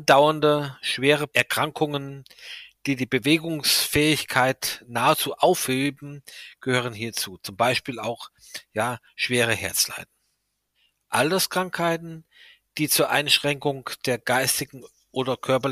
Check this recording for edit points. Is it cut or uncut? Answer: uncut